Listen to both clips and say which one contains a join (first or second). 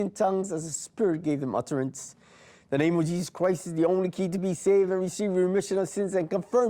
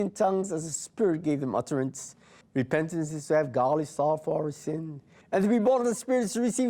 second